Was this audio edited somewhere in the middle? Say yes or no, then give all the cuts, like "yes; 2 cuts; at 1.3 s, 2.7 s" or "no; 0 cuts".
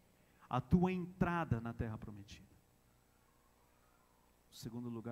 no; 0 cuts